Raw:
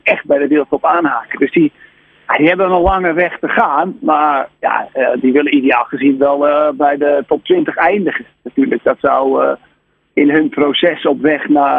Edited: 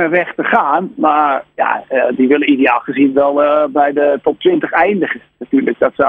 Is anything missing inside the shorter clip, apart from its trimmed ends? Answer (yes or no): no